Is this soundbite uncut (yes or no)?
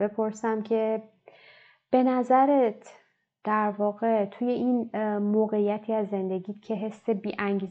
yes